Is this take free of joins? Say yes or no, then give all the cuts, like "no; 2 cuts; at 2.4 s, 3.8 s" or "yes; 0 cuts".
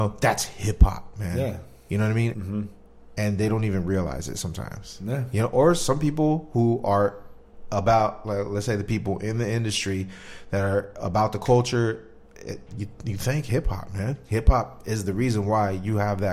no; 1 cut; at 2.3 s